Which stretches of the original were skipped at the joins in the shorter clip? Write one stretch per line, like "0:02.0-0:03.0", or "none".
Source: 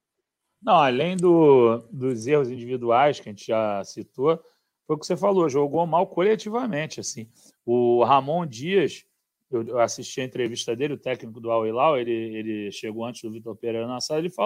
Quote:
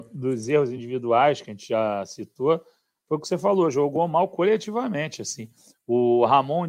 none